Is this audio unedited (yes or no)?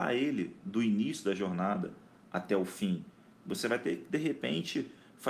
yes